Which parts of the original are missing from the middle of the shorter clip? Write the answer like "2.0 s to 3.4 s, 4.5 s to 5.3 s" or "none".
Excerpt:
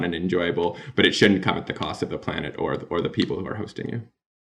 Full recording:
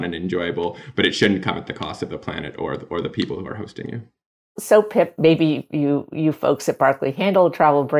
none